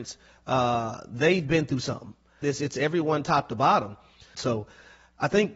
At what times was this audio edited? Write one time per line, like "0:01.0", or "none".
0:02.4
0:04.3